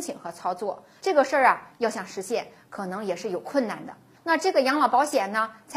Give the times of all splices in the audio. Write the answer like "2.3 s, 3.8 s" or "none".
1.0 s, 4.1 s